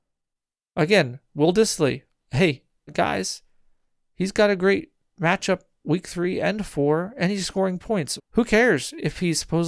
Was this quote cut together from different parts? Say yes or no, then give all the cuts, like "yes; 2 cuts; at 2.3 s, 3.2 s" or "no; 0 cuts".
yes; 2 cuts; at 2.9 s, 8.2 s